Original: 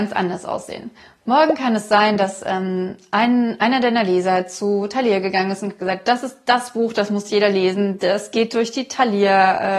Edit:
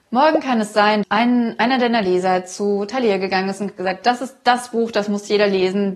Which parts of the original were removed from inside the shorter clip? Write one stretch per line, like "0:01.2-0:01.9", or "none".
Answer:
0:02.2-0:03.0

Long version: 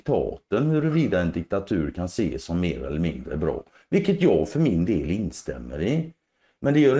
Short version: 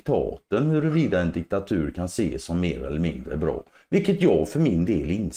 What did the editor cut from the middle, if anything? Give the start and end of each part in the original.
none

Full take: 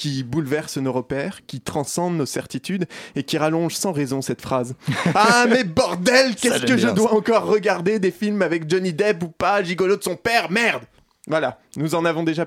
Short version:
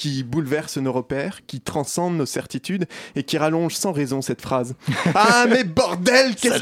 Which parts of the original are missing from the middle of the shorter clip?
none

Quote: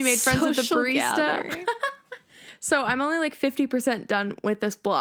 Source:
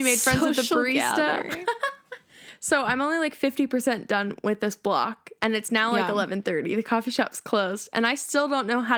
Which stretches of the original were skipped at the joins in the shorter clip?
none

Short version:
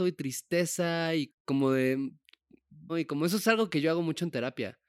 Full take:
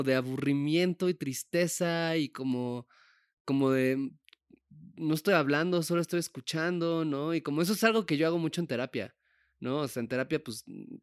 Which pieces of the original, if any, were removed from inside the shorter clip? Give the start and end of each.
0:02.3-0:03.3
0:04.9-0:07.3

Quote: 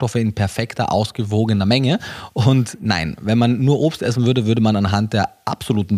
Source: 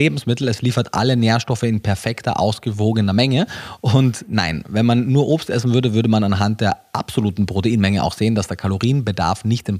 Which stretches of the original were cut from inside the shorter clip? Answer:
none

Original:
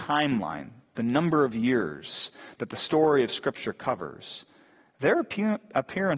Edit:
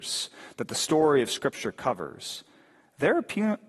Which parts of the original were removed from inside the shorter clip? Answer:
none

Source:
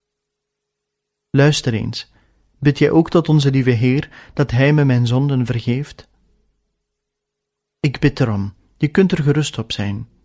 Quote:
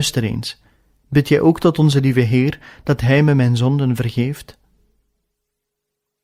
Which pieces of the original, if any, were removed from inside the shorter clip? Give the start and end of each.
none

